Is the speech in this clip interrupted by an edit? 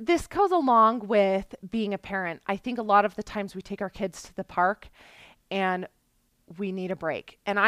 no; 0 cuts

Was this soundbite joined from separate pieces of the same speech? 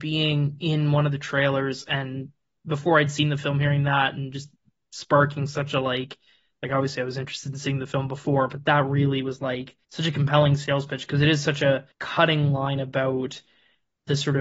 yes; 2 cuts; at 9.8 s, 11.9 s

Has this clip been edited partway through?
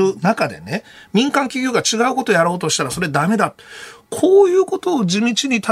no; 0 cuts

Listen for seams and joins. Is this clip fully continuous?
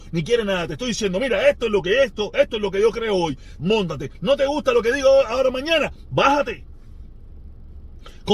no; 1 cut; at 3.6 s

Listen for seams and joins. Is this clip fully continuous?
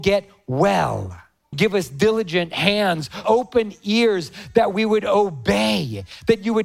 no; 2 cuts; at 1.5 s, 3.2 s

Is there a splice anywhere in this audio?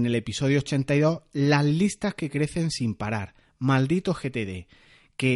no; 0 cuts

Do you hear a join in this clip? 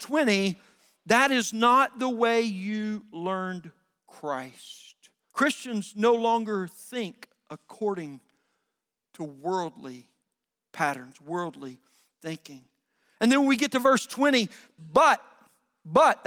yes; 2 cuts; at 5.3 s, 14.8 s

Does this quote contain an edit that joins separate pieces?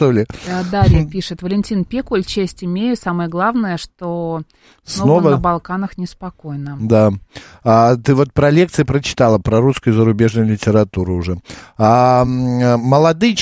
no; 0 cuts

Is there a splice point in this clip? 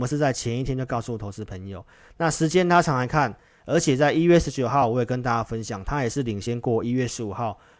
yes; 1 cut; at 3.6 s

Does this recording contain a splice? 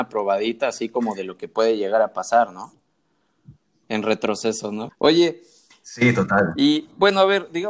yes; 2 cuts; at 3.8 s, 4.9 s

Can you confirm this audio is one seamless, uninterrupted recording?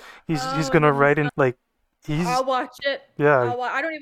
no; 1 cut; at 1.3 s

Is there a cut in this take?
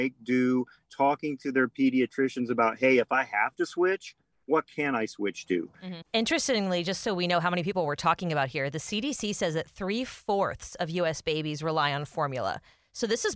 yes; 1 cut; at 6.0 s

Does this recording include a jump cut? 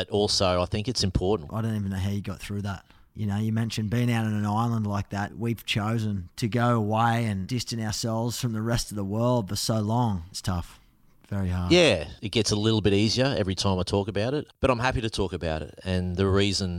yes; 2 cuts; at 1.5 s, 10.3 s

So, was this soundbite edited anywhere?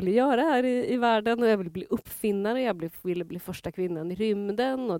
no; 0 cuts

